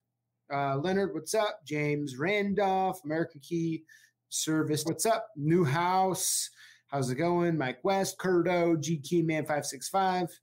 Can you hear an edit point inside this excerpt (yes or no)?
yes